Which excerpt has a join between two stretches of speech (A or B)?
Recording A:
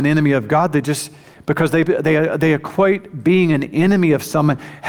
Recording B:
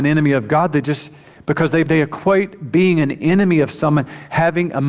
B